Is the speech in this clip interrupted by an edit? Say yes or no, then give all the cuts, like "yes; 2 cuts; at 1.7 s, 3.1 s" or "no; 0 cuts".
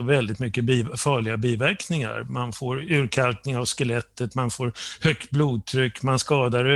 no; 0 cuts